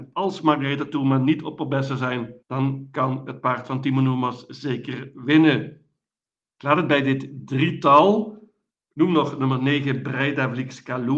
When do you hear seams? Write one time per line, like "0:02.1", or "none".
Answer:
0:02.4